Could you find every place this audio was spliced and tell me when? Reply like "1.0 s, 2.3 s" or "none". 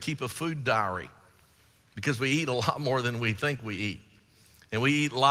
none